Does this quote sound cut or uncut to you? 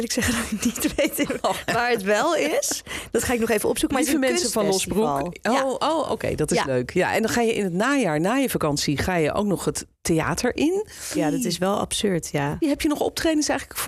cut